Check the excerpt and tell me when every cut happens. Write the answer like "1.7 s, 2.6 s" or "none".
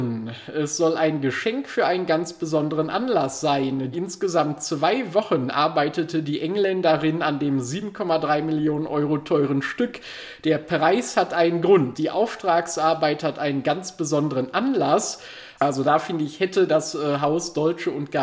3.9 s, 11.9 s, 15.6 s